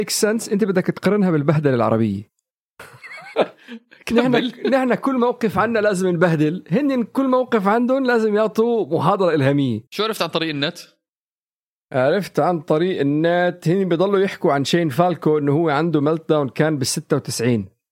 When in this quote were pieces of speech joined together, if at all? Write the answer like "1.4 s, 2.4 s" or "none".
3.3 s, 9.9 s